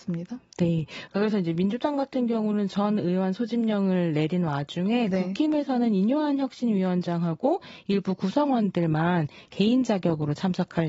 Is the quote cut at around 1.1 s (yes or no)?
yes